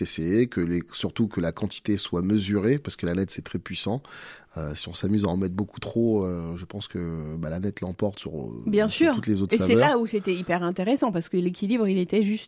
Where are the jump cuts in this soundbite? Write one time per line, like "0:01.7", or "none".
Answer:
none